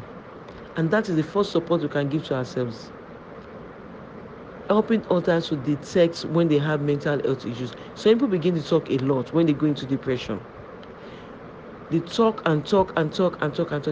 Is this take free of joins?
yes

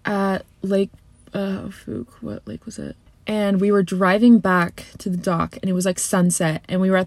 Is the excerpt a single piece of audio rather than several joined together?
no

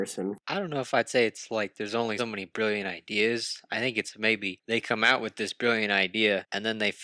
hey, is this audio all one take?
no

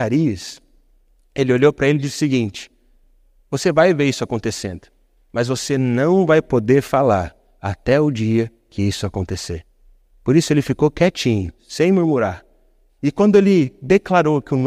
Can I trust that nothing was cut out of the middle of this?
no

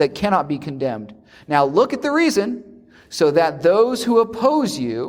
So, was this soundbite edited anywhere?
no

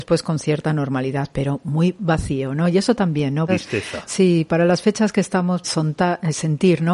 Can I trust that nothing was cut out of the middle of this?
no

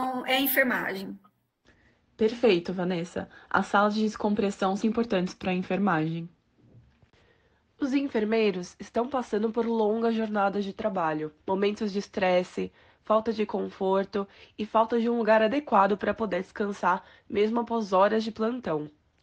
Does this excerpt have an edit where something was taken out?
yes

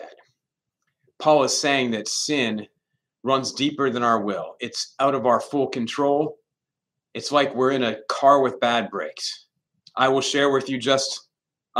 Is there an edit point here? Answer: yes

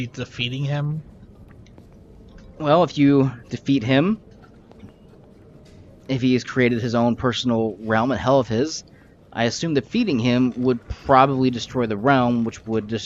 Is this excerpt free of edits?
yes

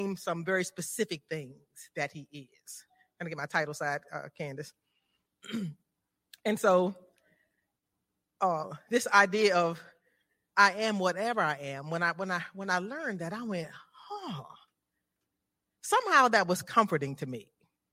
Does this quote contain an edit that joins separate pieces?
no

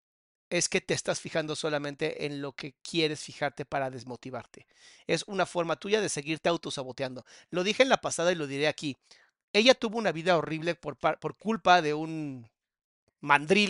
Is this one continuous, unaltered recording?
yes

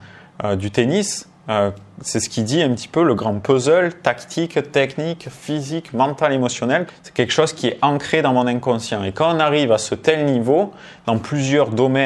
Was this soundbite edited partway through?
yes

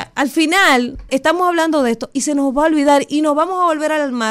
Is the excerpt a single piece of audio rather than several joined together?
no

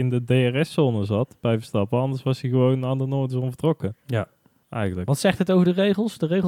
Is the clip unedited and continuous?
yes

